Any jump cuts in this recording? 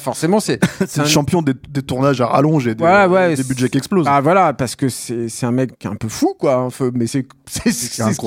yes; 2 cuts; at 5.7 s, 7.1 s

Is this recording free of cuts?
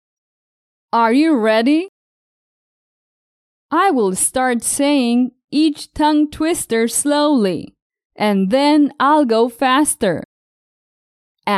no; 1 cut; at 3.6 s

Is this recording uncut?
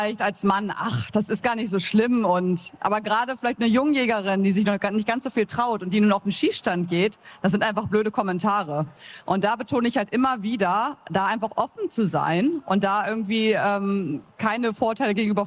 yes; 0 cuts

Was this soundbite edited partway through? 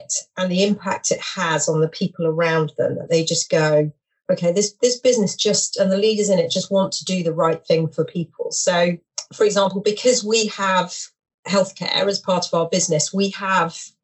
no; 0 cuts

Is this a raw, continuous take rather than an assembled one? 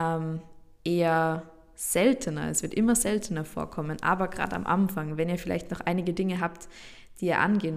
yes; 0 cuts

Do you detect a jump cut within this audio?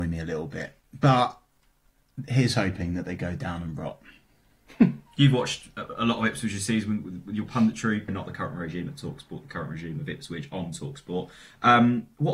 yes; 1 cut; at 8.1 s

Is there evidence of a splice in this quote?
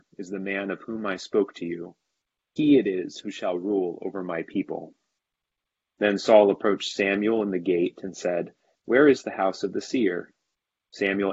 yes; 1 cut; at 8.7 s

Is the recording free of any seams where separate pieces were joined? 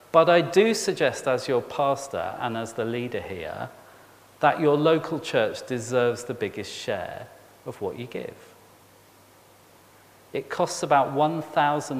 yes; 0 cuts

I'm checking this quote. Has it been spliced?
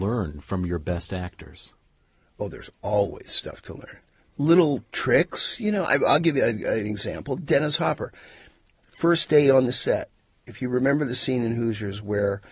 no; 0 cuts

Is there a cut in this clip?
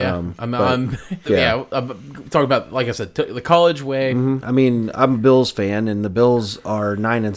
yes; 2 cuts; at 1.3 s, 4.4 s

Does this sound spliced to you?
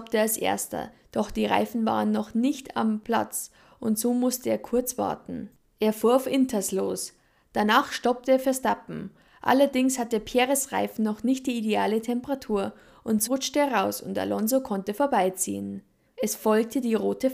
yes; 2 cuts; at 13.3 s, 16.1 s

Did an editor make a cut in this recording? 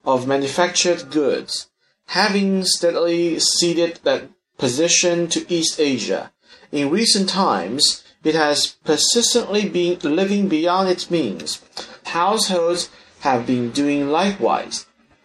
yes; 1 cut; at 12.0 s

